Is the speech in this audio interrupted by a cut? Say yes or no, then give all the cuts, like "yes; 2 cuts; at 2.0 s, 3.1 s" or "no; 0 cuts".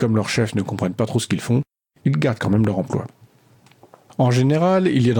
no; 0 cuts